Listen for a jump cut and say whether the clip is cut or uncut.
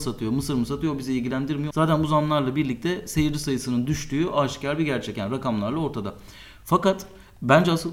cut